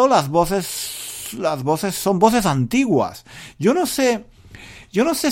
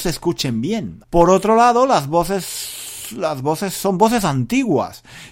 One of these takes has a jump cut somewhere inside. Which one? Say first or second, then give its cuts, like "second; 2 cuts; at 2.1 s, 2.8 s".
second; 1 cut; at 1.0 s